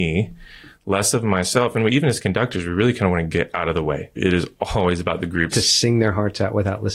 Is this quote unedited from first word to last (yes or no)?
no